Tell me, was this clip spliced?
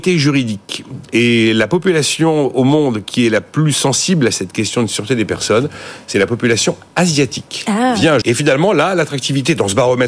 yes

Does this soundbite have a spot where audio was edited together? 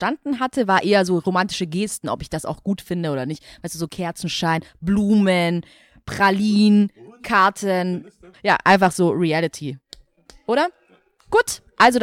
yes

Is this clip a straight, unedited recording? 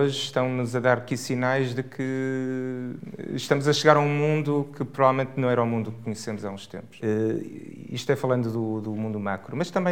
no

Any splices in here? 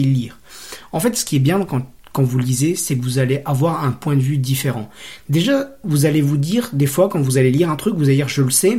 no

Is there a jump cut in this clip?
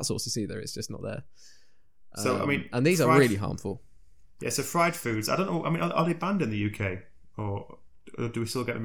no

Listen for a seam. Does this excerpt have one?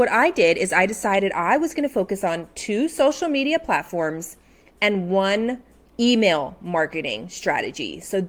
no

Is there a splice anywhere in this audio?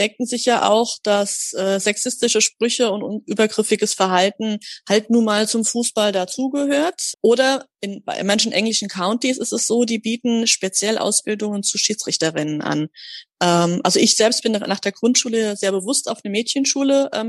yes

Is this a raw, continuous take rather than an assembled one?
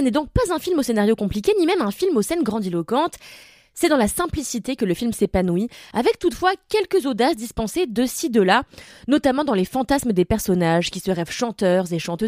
yes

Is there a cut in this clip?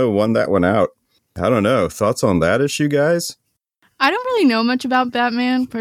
no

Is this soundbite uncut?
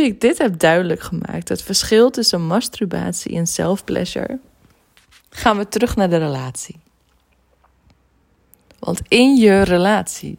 yes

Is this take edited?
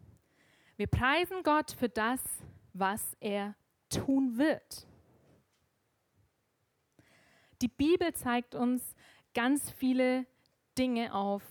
no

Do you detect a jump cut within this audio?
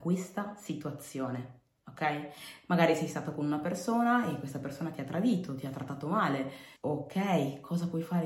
yes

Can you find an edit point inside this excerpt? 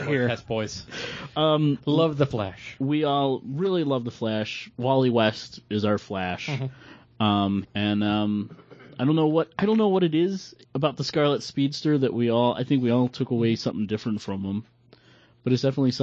yes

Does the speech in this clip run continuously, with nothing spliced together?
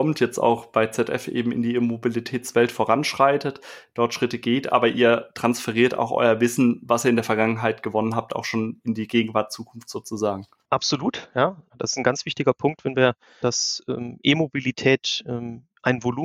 no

